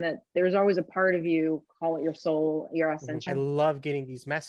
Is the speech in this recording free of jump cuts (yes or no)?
no